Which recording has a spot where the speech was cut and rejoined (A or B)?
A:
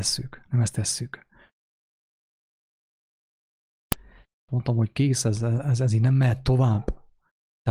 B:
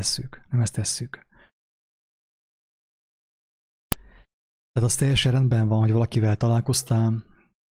A